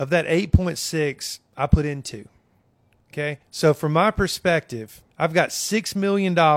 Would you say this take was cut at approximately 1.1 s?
no; 2 cuts; at 3.4 s, 5.1 s

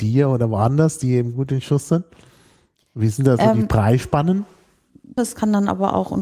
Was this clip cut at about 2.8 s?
no; 1 cut; at 5.2 s

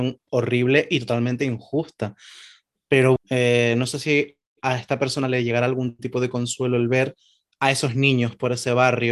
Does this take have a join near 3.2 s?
yes; 1 cut; at 3.2 s

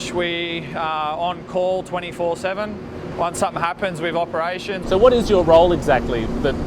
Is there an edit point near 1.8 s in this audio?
no; 2 cuts; at 3.1 s, 4.8 s

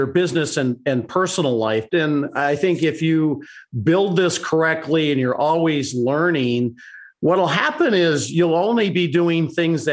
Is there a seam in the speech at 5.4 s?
no; 1 cut; at 1.9 s

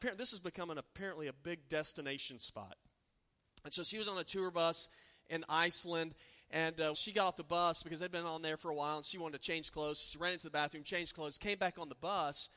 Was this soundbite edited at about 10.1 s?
no; 1 cut; at 6.9 s

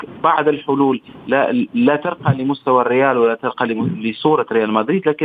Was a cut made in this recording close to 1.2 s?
no; 0 cuts

